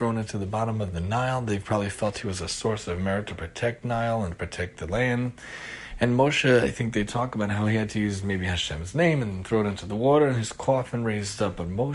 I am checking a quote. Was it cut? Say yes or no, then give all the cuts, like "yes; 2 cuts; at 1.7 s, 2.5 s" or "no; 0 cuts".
no; 0 cuts